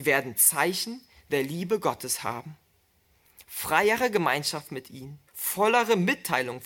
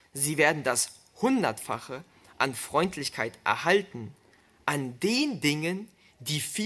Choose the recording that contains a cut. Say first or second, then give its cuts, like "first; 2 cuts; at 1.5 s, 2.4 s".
first; 1 cut; at 5.3 s